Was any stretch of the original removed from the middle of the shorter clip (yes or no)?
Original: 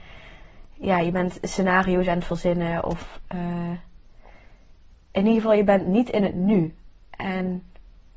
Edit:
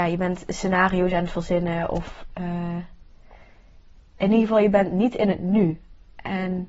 no